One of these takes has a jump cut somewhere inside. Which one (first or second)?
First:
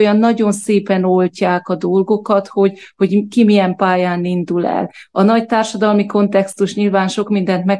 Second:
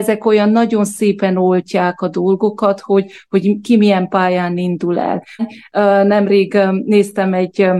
second